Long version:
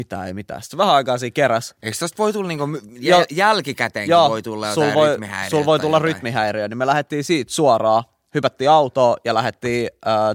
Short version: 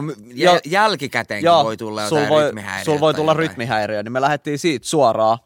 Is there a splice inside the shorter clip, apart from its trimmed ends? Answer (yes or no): no